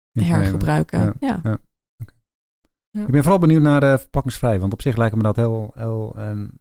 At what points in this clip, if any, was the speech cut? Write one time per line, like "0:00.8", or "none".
none